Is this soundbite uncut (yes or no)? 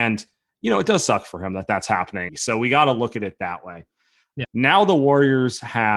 no